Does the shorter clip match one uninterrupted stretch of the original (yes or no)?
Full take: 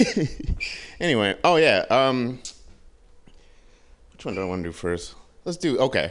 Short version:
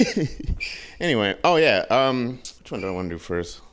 no